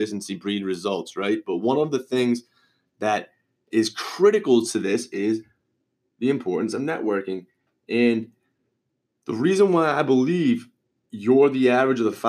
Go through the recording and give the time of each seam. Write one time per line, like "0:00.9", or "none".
none